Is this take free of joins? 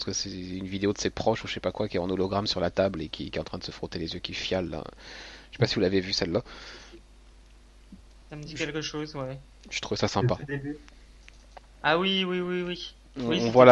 yes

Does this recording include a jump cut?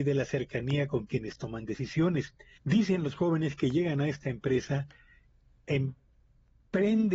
yes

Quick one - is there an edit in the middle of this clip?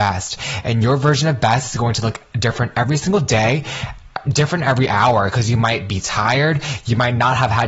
no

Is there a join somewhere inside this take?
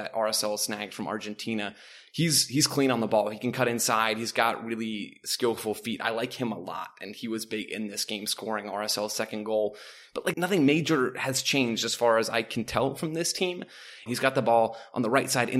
yes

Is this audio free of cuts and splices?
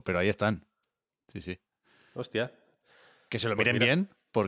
yes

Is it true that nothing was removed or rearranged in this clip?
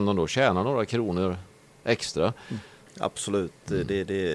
no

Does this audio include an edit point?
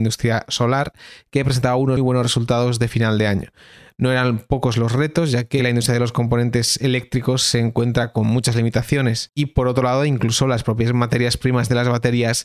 yes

